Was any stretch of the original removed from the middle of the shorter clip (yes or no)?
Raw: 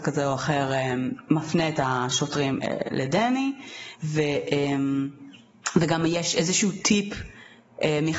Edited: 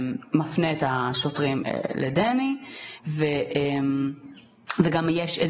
no